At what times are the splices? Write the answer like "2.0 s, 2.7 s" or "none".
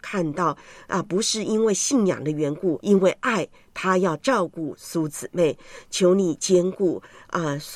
2.8 s